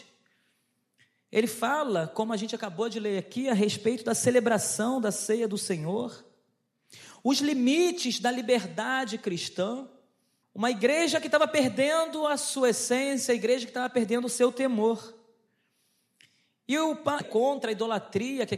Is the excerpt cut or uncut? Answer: cut